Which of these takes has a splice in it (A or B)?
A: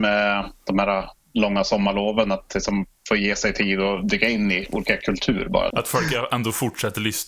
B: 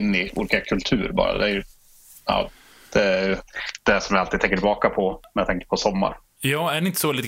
A